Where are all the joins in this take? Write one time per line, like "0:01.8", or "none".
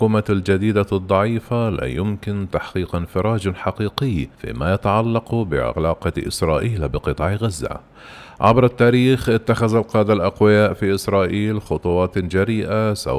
0:04.3